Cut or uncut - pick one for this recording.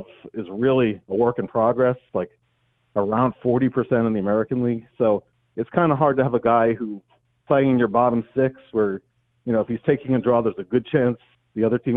uncut